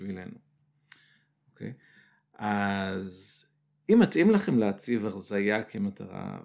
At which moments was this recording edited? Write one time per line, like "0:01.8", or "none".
none